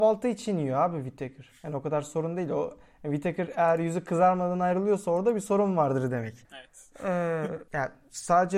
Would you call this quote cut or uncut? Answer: cut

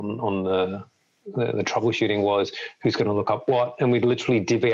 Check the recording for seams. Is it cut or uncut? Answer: uncut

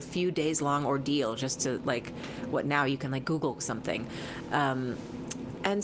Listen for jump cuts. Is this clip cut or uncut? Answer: uncut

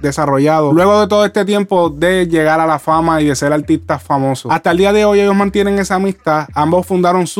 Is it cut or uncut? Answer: uncut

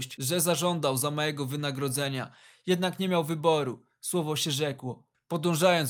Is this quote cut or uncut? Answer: uncut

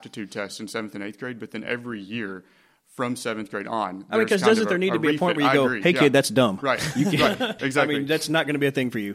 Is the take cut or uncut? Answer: cut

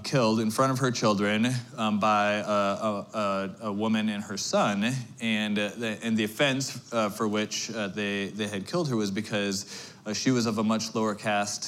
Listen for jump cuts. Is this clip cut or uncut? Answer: uncut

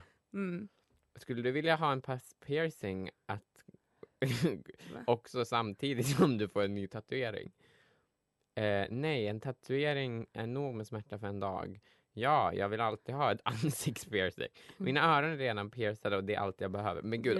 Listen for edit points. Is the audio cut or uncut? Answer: uncut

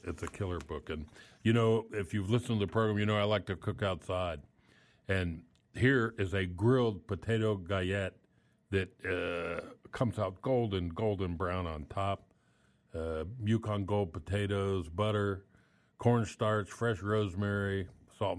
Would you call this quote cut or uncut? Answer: uncut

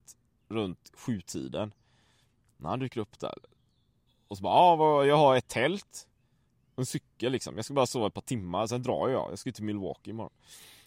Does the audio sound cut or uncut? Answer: uncut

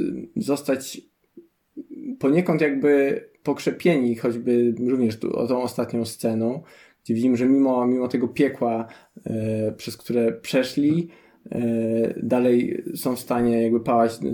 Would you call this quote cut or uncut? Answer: uncut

